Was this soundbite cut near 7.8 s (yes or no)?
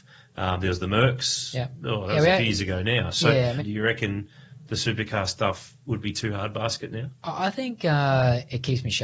no